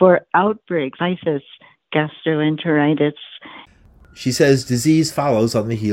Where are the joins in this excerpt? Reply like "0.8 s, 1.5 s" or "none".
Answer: 1.0 s